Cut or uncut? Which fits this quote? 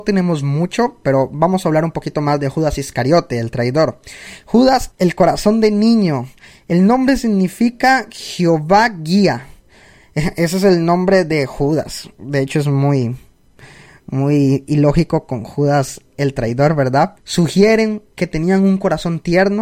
cut